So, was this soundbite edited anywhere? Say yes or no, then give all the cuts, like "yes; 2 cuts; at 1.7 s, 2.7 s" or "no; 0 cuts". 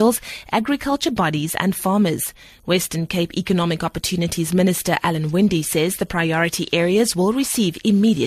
no; 0 cuts